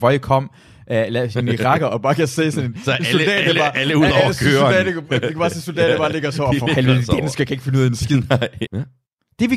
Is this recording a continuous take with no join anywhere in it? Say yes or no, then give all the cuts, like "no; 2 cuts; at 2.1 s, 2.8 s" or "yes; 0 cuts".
no; 1 cut; at 8.7 s